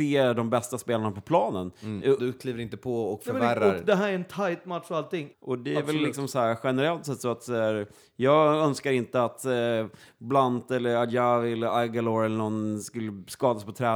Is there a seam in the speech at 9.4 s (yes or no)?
no